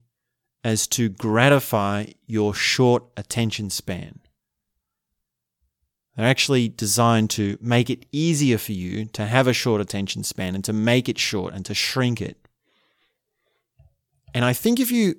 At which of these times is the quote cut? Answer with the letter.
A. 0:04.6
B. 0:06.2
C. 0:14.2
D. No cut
D